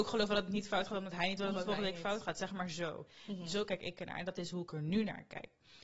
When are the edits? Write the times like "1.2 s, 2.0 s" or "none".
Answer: none

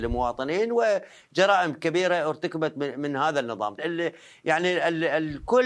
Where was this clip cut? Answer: 3.8 s

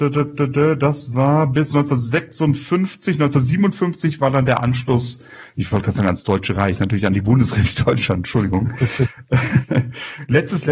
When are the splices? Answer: none

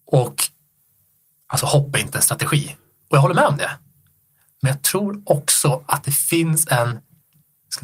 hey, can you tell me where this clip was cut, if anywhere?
none

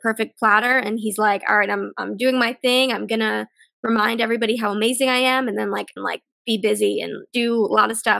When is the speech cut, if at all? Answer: 6.0 s, 7.3 s

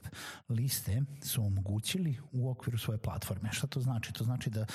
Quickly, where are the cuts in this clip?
none

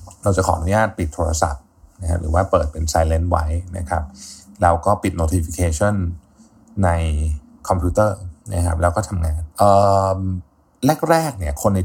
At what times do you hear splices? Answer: 8.4 s, 9.5 s

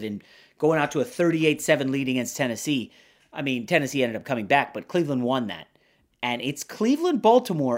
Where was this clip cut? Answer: none

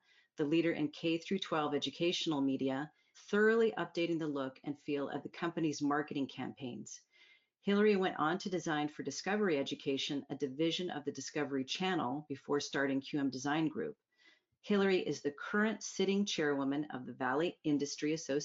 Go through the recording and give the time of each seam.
3.1 s

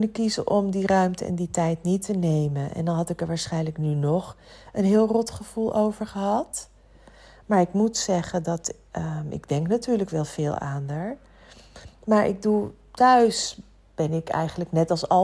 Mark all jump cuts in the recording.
none

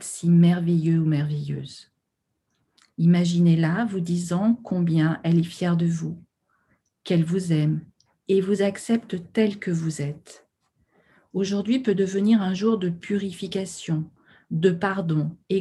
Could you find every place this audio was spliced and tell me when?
none

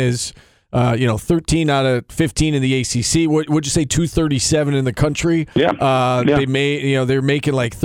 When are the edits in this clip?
none

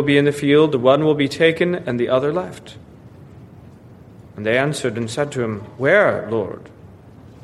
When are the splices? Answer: none

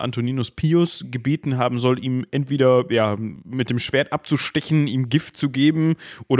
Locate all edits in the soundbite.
none

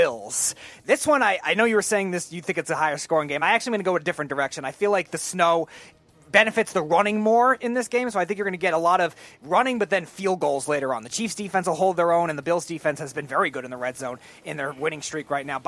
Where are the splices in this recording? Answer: none

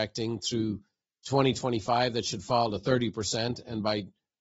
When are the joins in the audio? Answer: none

